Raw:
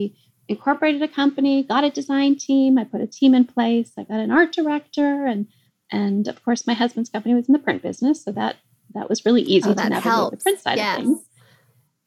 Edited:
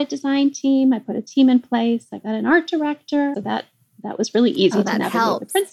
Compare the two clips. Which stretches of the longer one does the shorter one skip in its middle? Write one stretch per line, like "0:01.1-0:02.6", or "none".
0:05.2-0:08.2